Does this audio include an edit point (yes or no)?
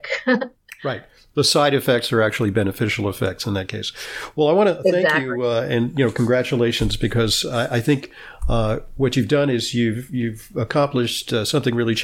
no